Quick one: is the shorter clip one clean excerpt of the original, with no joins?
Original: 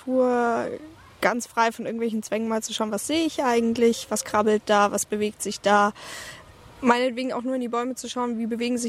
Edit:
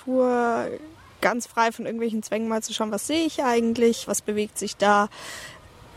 no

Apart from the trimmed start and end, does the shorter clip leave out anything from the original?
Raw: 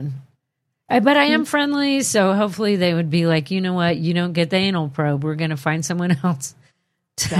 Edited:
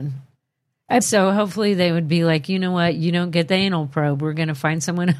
yes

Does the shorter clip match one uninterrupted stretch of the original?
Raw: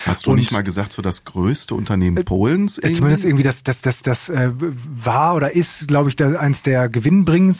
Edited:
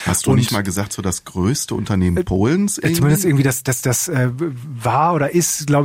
no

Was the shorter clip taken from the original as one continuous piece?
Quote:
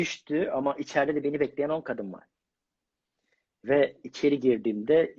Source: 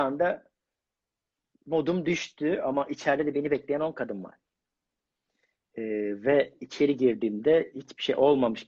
no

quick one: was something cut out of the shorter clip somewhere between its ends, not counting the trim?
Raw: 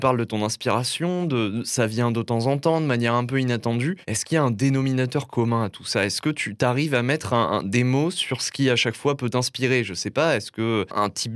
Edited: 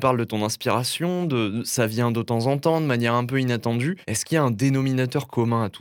no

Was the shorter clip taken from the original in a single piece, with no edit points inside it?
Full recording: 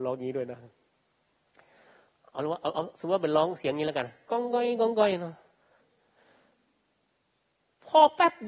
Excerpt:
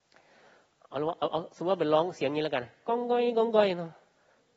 yes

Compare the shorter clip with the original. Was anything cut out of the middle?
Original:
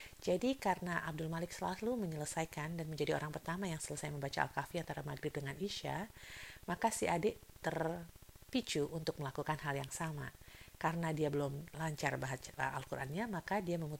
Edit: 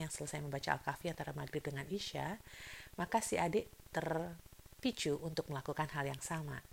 no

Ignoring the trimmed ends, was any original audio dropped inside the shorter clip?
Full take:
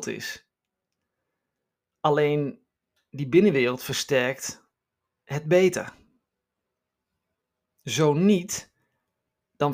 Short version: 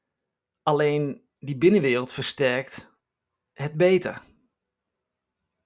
yes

